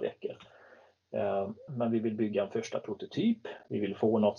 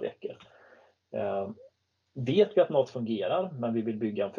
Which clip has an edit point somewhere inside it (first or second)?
first